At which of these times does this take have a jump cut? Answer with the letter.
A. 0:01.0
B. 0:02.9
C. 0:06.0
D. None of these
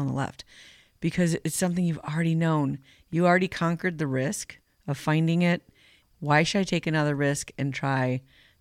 C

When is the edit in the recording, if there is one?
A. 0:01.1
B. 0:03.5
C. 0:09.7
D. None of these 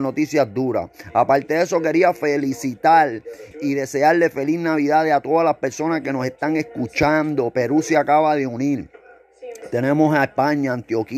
B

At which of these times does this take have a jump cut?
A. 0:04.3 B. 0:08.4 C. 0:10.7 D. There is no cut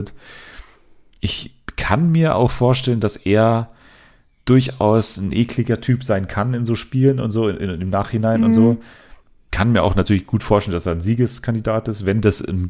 D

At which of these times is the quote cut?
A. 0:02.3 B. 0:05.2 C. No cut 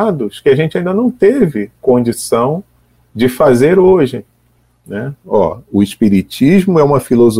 B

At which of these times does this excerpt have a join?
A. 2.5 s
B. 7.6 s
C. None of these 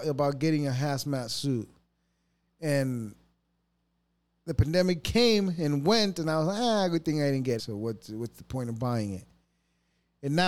B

